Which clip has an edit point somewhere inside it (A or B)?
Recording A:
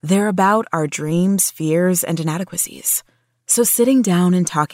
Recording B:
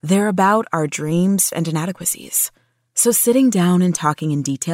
B